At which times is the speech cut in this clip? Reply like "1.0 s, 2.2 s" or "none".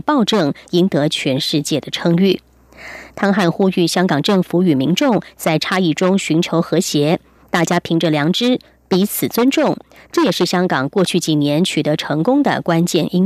none